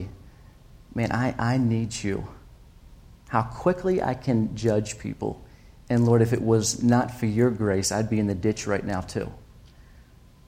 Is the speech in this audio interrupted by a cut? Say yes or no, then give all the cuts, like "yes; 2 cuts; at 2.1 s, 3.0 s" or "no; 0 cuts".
no; 0 cuts